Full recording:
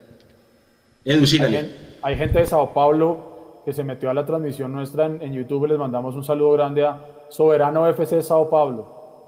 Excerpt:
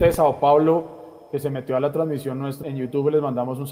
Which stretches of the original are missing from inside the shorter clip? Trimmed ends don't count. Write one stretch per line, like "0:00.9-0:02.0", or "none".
0:05.0-0:05.2